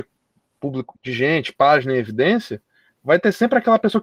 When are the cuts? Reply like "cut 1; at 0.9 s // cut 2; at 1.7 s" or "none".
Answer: cut 1; at 0.9 s